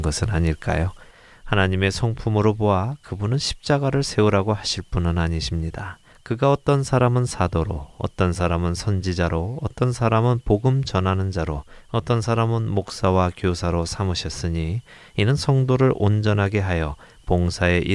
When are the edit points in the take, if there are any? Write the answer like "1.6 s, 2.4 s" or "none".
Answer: 6.1 s